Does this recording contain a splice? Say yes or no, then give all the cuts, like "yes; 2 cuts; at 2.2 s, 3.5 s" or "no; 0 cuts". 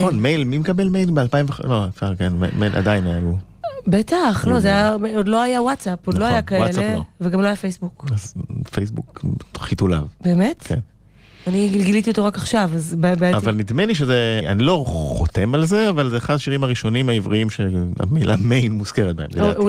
yes; 1 cut; at 14.4 s